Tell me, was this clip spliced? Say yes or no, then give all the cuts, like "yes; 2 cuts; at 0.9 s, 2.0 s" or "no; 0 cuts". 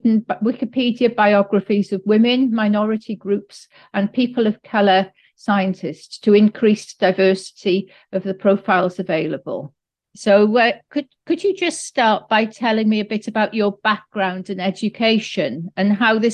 yes; 1 cut; at 10.0 s